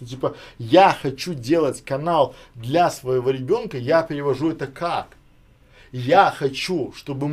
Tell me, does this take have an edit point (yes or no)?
no